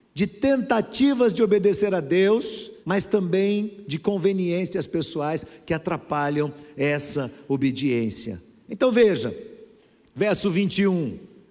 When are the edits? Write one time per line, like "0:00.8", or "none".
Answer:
0:02.8